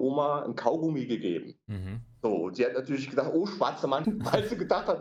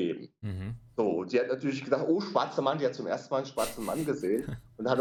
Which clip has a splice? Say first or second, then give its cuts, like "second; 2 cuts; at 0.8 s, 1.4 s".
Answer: first; 1 cut; at 4.0 s